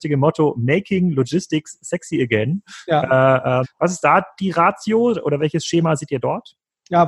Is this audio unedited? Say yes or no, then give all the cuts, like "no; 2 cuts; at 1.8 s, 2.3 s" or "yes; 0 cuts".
no; 2 cuts; at 3.6 s, 5.4 s